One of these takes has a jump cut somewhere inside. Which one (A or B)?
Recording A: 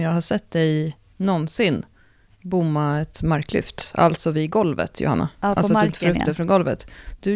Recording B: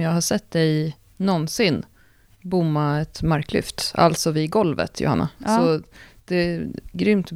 B